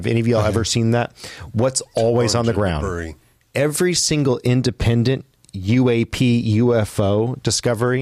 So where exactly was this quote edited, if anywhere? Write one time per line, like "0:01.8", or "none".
0:03.4